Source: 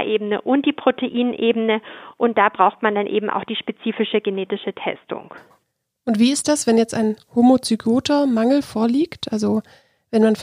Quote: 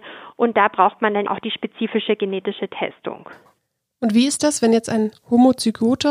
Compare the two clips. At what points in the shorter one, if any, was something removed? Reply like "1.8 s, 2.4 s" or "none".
1.3 s